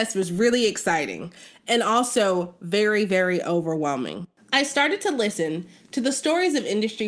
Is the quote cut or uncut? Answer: uncut